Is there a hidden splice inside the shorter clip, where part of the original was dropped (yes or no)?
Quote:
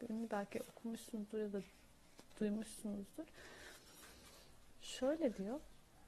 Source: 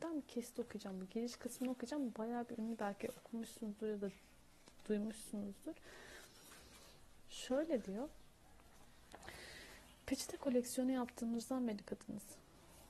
no